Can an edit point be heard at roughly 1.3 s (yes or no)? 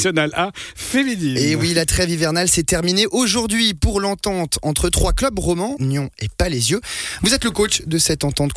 no